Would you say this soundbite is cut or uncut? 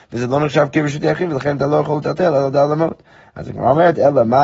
uncut